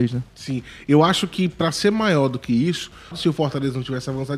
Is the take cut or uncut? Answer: cut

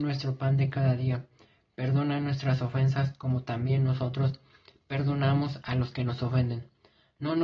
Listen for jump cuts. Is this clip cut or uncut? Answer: uncut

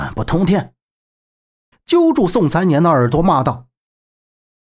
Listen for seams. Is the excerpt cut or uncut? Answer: cut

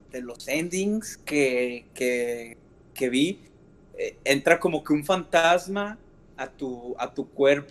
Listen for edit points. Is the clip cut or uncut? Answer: uncut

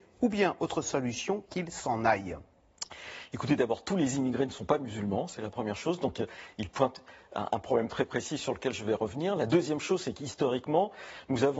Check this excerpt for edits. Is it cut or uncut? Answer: uncut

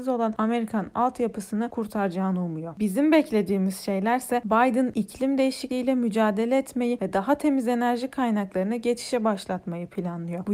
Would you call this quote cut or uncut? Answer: uncut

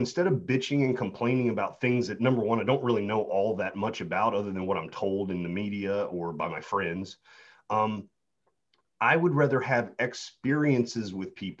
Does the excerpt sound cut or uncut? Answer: uncut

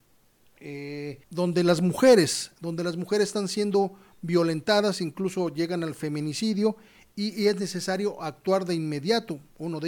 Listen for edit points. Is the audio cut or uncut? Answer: cut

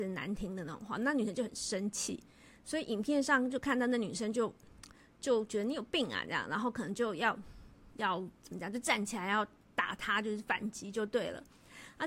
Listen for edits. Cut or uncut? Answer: uncut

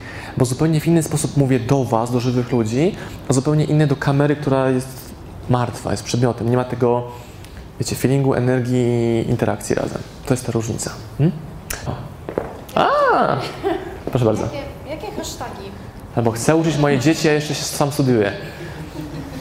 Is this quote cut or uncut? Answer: cut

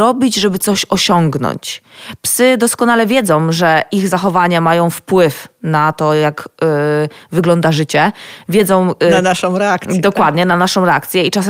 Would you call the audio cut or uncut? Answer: uncut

